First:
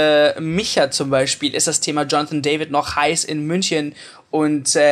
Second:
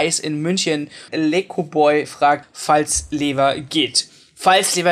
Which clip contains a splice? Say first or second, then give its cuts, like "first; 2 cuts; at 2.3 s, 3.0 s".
second; 2 cuts; at 1.1 s, 2.4 s